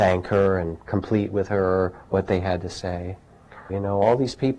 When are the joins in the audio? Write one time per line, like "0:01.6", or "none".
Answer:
0:03.7